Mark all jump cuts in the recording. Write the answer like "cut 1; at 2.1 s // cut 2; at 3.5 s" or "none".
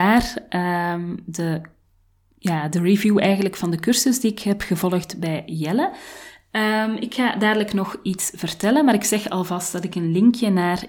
none